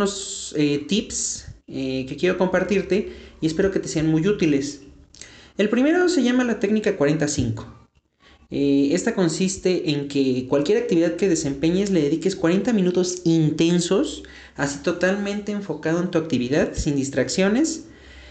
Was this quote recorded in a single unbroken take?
yes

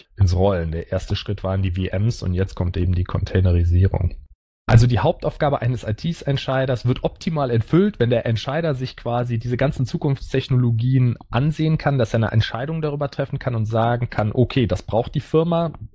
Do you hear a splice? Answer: no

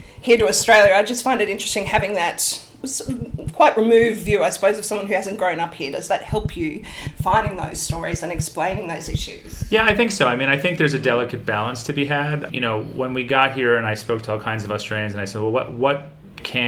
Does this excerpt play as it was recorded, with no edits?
yes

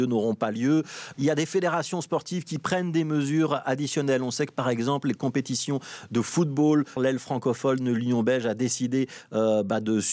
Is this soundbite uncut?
no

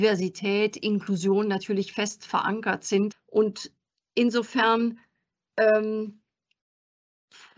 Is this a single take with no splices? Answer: no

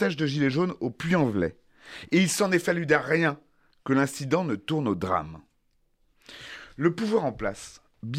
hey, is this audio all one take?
yes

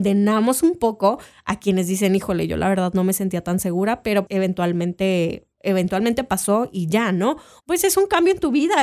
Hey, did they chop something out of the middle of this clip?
yes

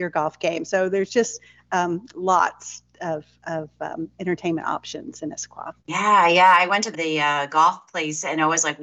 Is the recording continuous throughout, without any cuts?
no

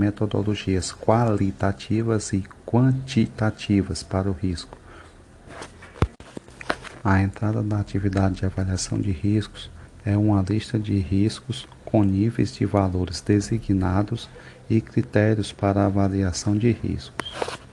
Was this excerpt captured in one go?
yes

